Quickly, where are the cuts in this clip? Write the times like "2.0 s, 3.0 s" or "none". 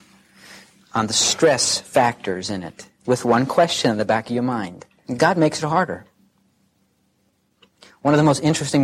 5.0 s